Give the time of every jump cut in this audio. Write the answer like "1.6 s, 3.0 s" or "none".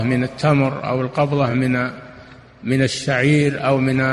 none